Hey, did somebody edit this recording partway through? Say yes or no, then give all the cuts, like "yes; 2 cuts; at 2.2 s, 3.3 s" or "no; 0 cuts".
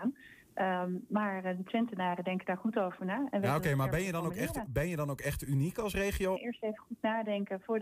yes; 1 cut; at 6.4 s